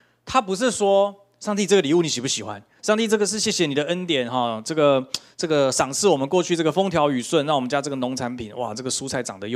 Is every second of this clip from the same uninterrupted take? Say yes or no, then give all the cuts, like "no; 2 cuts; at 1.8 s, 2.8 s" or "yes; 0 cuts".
no; 1 cut; at 2.8 s